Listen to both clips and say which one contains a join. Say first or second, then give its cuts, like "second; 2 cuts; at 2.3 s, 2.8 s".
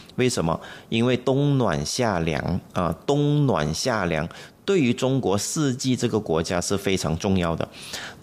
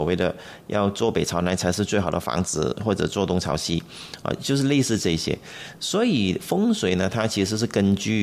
first; 1 cut; at 2.7 s